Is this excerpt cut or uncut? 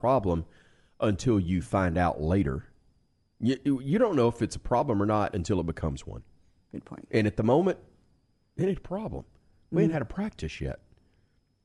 uncut